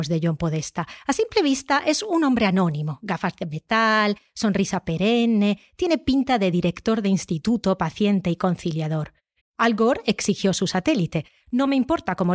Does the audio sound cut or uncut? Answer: cut